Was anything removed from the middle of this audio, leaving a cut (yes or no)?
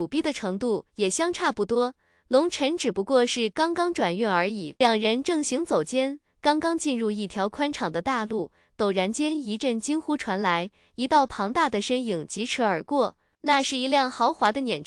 no